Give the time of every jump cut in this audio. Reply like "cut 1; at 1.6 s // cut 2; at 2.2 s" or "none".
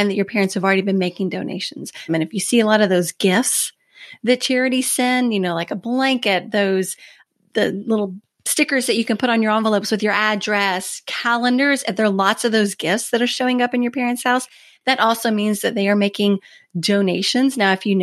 cut 1; at 2.1 s